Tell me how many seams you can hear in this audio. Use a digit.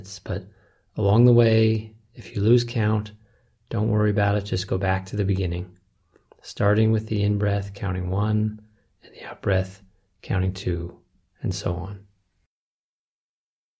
0